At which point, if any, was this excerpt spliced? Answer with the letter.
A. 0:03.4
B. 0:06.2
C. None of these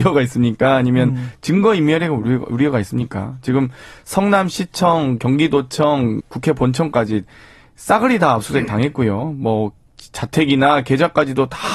B